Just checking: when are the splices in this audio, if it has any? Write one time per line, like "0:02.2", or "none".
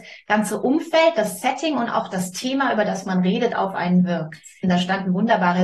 0:04.6